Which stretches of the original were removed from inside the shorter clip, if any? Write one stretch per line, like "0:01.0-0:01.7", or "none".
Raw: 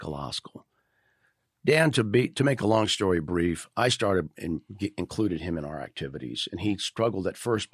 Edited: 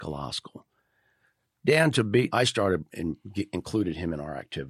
0:02.3-0:03.7